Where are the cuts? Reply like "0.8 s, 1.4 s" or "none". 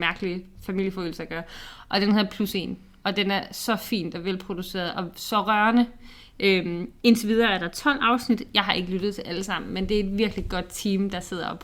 none